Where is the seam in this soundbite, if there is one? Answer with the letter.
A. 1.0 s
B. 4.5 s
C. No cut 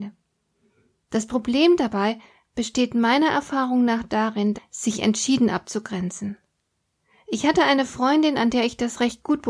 B